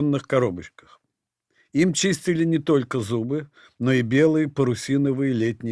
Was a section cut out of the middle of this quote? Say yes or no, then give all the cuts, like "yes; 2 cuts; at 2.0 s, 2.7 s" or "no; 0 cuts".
no; 0 cuts